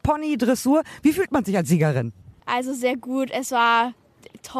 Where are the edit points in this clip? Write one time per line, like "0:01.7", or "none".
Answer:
0:02.4

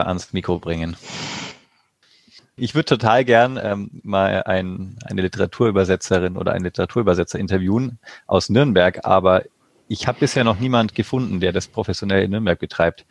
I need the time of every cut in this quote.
none

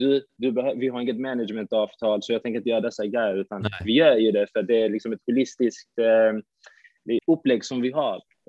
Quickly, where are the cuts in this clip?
0:07.2

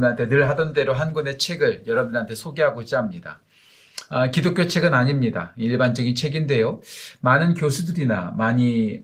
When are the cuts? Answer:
none

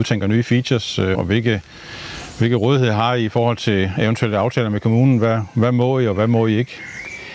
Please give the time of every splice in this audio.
0:01.1

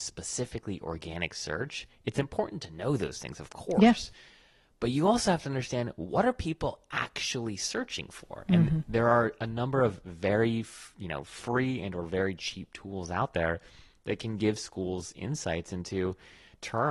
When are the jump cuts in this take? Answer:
none

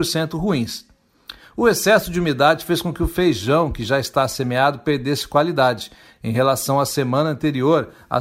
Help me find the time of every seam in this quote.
none

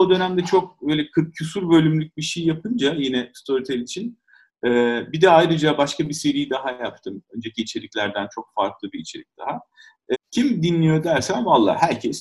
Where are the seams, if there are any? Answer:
0:10.1

